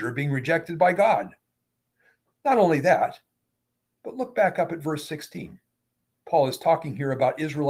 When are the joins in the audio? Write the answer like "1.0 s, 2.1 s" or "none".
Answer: 6.1 s

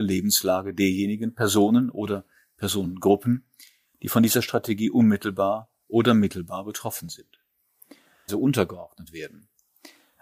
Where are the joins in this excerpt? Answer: 8.3 s

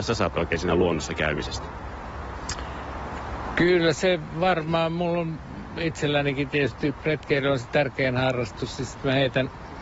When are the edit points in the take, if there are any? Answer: none

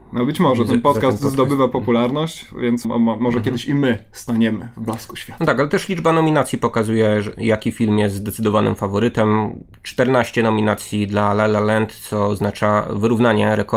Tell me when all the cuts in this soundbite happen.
2.8 s

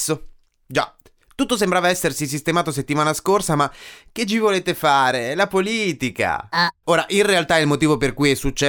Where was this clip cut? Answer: 6.8 s

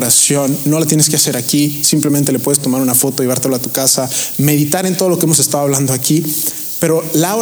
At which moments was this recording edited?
none

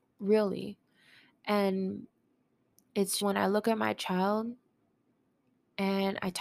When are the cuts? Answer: 3.2 s

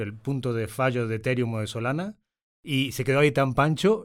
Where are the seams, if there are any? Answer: none

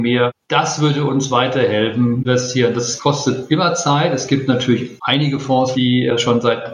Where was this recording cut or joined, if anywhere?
2.2 s, 5.7 s

